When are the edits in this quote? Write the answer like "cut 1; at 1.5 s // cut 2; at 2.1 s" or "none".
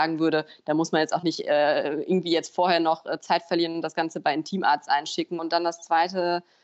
cut 1; at 5.4 s